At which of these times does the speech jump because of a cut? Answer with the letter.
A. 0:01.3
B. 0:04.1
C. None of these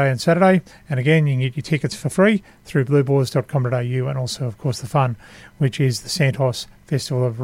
C